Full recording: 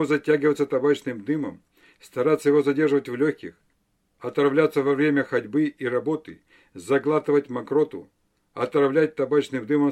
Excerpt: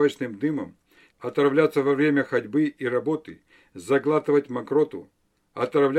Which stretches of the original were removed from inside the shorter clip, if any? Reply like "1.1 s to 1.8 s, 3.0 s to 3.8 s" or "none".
2.0 s to 4.1 s